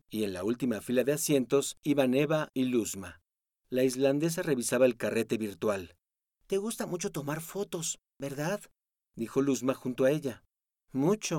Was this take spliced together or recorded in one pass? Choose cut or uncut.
uncut